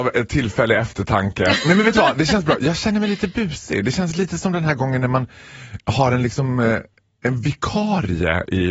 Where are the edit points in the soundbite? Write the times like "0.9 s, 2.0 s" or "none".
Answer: none

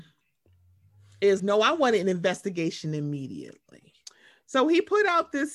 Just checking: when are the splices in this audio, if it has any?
1.4 s, 4.5 s

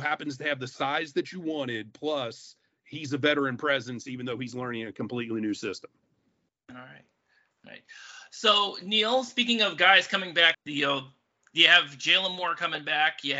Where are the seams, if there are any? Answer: 10.5 s

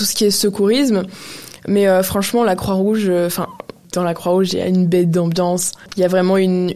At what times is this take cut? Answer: none

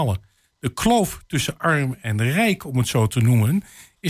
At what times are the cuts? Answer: none

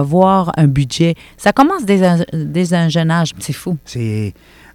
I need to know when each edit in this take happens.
3.3 s

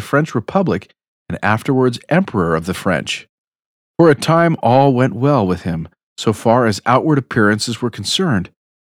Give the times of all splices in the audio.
none

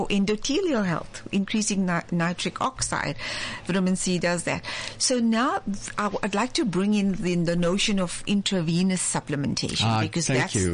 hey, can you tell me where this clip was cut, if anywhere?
none

